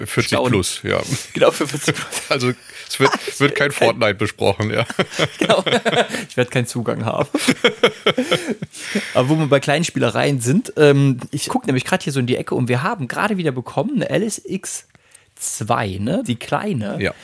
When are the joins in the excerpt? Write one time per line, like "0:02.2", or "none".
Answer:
0:11.5
0:16.2